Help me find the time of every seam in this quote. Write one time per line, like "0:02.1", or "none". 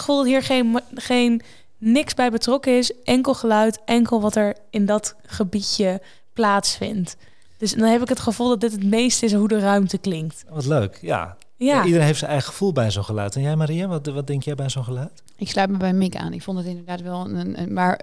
none